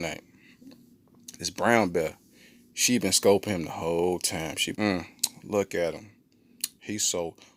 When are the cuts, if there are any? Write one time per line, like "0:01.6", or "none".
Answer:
0:04.8

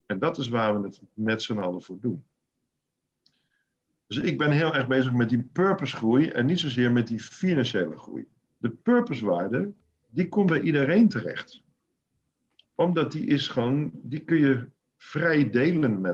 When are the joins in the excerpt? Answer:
0:08.6

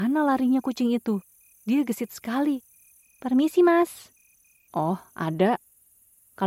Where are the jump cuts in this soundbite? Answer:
0:03.0
0:04.7

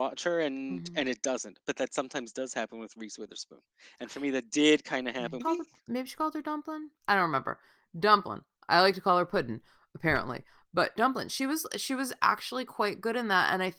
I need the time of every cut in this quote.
0:05.4

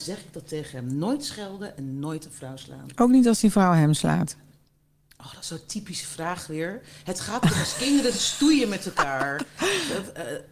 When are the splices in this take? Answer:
none

